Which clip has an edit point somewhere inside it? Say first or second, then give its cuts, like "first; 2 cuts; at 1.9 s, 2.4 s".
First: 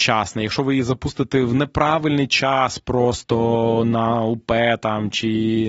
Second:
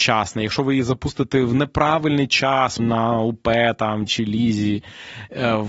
second; 2 cuts; at 2.8 s, 4.1 s